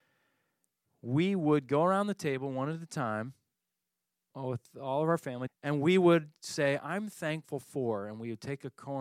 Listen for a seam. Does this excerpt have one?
yes; 1 cut; at 5.5 s

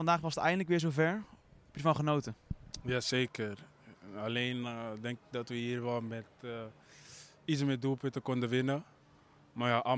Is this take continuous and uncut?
yes; 0 cuts

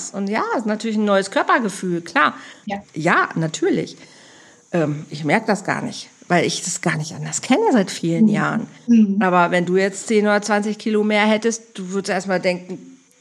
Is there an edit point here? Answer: yes; 1 cut; at 2.6 s

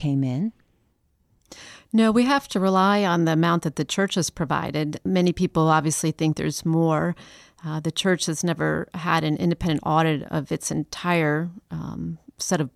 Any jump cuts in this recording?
no; 0 cuts

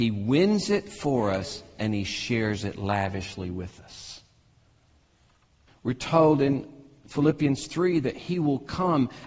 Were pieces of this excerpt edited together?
yes; 1 cut; at 5.7 s

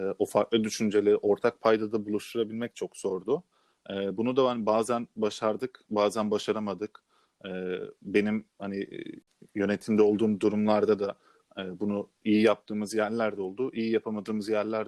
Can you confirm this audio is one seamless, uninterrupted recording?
yes; 0 cuts

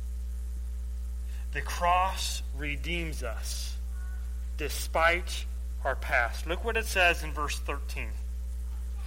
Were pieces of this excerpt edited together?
no; 0 cuts

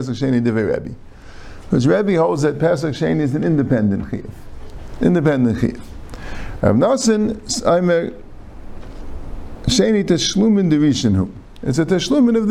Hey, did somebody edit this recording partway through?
yes; 1 cut; at 6.6 s

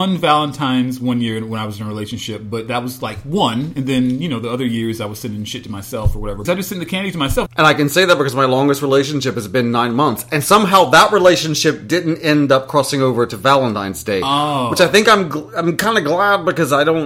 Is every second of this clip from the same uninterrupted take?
no; 2 cuts; at 6.5 s, 7.5 s

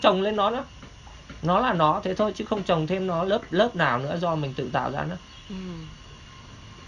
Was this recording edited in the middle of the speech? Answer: no; 0 cuts

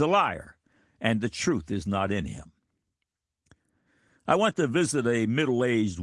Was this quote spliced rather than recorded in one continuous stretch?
no; 0 cuts

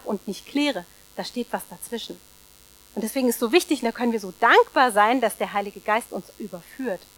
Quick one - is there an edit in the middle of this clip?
no; 0 cuts

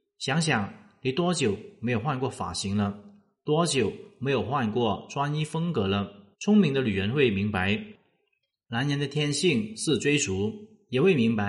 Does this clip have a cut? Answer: yes; 1 cut; at 6.3 s

